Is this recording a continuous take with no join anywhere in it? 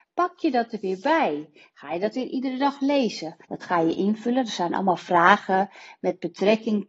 no; 1 cut; at 3.4 s

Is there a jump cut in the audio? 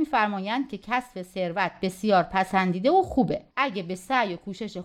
yes; 1 cut; at 3.5 s

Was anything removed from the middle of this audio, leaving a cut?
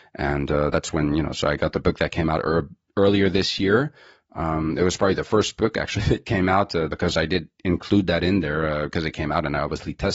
yes; 1 cut; at 6.9 s

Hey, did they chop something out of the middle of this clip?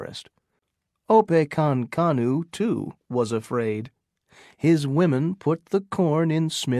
no; 0 cuts

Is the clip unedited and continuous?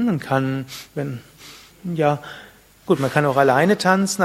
no; 1 cut; at 2.9 s

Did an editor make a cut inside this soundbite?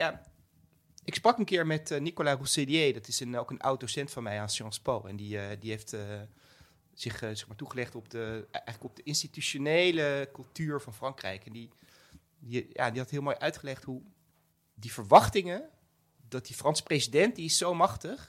no; 0 cuts

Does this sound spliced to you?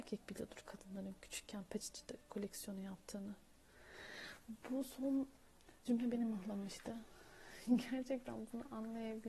no; 0 cuts

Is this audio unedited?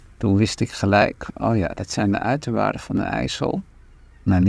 yes; 0 cuts

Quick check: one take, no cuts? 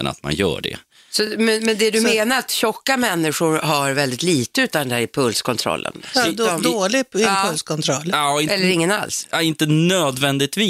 yes; 0 cuts

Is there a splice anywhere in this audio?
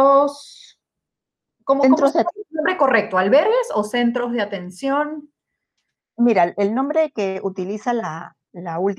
no; 0 cuts

